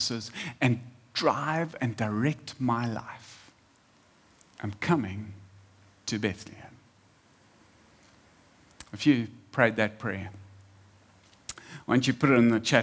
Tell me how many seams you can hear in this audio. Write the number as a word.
zero